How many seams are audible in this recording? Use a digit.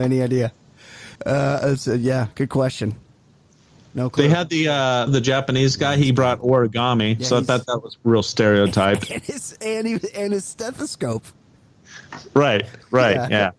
2